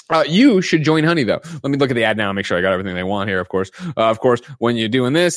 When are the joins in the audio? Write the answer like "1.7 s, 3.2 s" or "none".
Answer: none